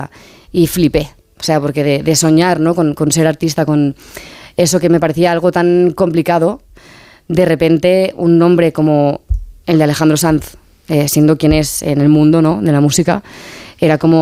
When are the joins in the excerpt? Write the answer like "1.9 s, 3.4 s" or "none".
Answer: none

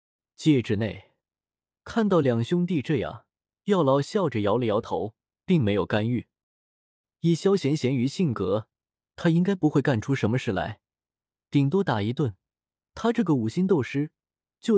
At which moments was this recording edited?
none

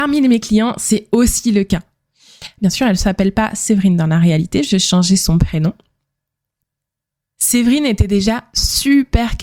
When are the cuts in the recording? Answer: 2.6 s

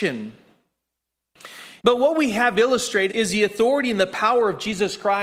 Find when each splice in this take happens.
1.8 s, 3.1 s

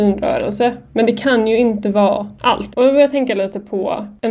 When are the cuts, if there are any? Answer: 2.7 s

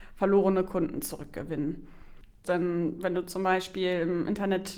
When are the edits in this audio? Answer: 2.4 s

